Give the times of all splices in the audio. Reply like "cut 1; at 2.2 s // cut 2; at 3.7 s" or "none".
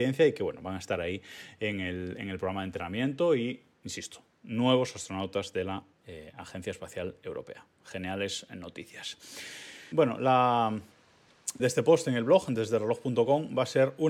cut 1; at 9.9 s // cut 2; at 11.6 s

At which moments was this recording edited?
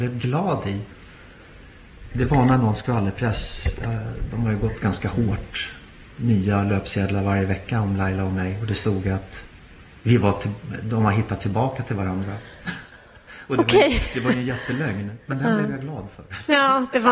none

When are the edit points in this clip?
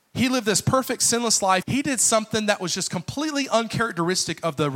cut 1; at 1.6 s

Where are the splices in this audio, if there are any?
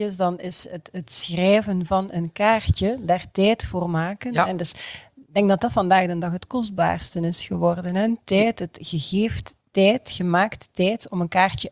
none

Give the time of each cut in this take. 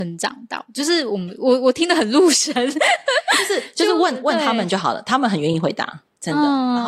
none

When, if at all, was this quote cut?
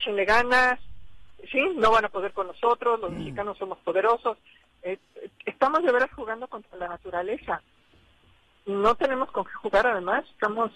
cut 1; at 4.8 s

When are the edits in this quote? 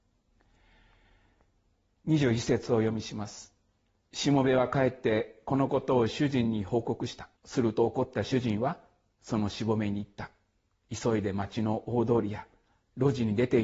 cut 1; at 7.4 s

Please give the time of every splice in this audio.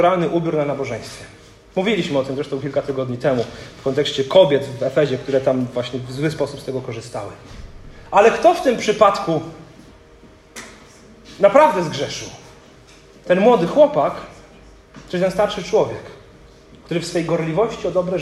none

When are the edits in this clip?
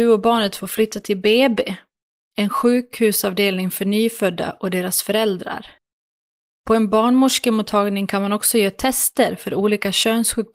cut 1; at 6.5 s

